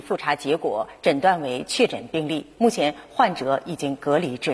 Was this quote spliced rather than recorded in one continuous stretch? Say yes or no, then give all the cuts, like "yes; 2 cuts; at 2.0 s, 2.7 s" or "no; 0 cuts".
no; 0 cuts